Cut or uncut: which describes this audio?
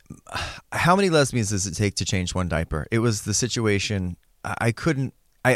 uncut